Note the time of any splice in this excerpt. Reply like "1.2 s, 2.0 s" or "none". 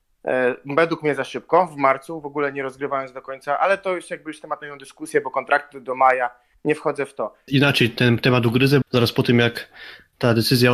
7.5 s, 8.8 s